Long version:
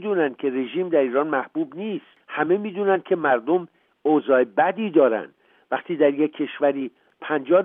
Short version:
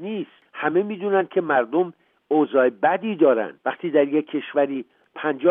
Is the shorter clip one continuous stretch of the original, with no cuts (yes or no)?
no